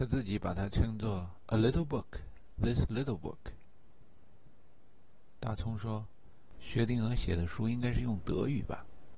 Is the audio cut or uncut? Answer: uncut